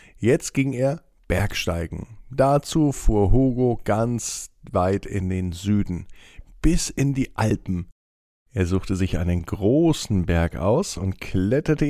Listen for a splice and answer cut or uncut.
uncut